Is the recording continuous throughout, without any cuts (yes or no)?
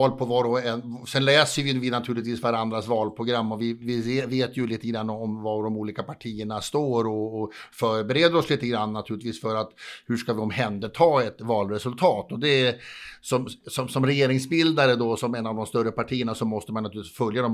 yes